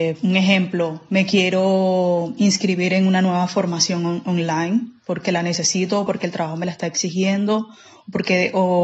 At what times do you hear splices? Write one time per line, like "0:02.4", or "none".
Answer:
none